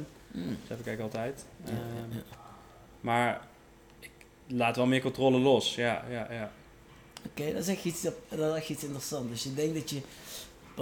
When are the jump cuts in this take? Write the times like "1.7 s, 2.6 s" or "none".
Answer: none

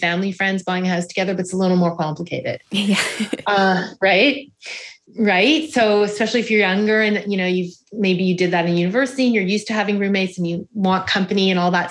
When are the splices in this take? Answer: 5.1 s

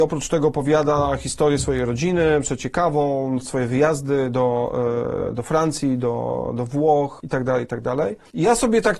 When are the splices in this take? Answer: none

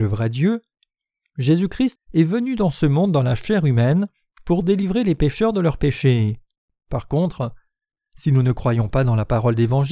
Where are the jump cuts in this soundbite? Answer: 2.0 s, 6.7 s

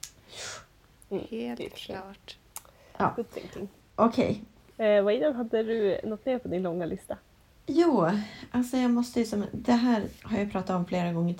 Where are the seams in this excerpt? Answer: 10.2 s

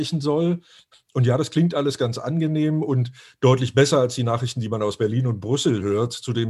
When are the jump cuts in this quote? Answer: 0.9 s

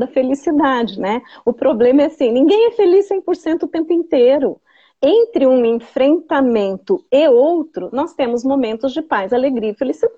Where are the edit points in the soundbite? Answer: none

